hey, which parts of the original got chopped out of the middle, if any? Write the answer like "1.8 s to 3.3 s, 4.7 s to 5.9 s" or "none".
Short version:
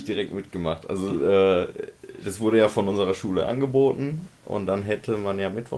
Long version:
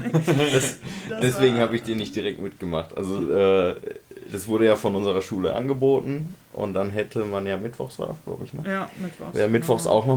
none